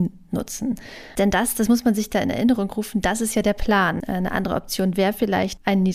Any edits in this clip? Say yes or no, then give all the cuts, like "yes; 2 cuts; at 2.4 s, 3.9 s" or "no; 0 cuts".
yes; 2 cuts; at 1.2 s, 4.0 s